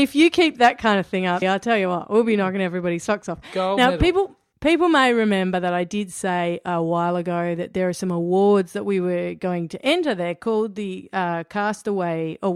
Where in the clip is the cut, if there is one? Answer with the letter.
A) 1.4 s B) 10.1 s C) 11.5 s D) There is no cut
A